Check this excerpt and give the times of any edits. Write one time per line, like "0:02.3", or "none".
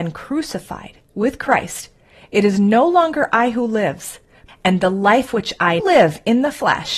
0:04.5
0:05.8